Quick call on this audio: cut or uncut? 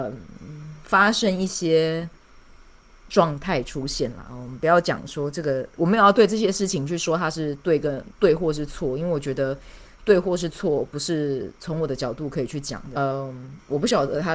cut